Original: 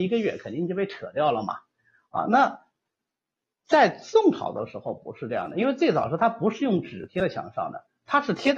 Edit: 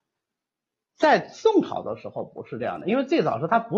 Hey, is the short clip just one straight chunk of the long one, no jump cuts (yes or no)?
yes